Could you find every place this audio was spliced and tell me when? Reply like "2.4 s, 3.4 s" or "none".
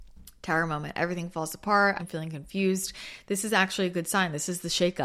2.0 s